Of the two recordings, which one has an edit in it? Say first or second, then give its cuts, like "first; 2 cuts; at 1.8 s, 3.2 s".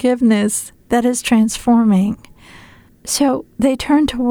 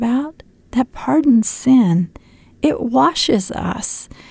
first; 1 cut; at 2.9 s